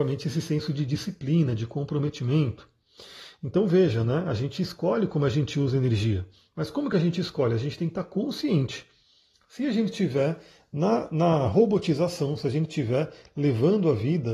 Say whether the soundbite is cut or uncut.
uncut